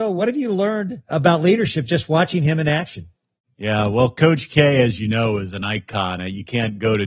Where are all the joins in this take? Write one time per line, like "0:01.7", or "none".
none

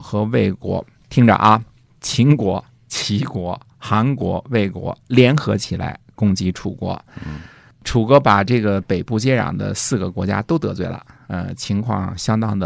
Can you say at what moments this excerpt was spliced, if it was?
none

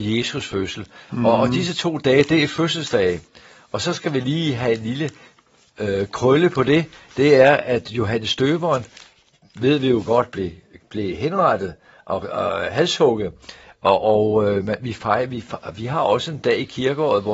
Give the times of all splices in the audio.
0:01.1

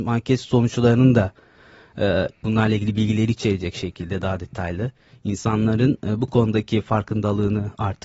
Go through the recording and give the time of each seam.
0:02.4

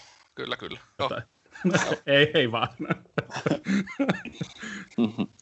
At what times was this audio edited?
0:01.0

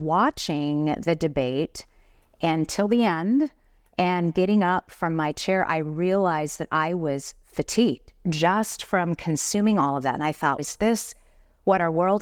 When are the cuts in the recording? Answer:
0:10.6

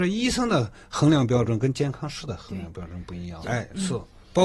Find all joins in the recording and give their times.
0:03.4

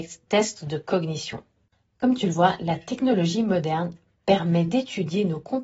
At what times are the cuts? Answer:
none

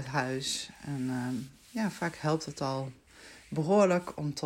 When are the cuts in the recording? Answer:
none

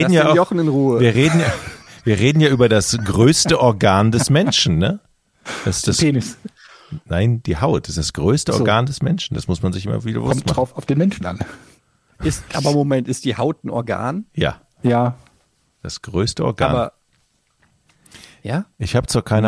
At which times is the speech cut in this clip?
none

